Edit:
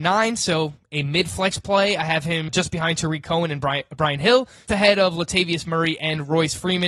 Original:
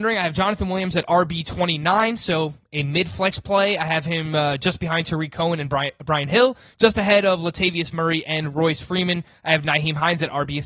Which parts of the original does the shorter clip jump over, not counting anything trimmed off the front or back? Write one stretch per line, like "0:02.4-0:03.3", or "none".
0:04.3-0:04.6
0:06.8-0:06.9